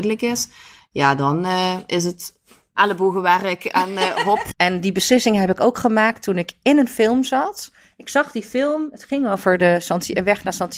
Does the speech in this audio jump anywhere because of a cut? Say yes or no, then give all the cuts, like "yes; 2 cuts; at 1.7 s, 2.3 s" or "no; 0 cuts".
yes; 1 cut; at 4.5 s